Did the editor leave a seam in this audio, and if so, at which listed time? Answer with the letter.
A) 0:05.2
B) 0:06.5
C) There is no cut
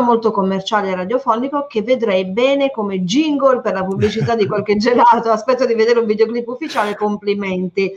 C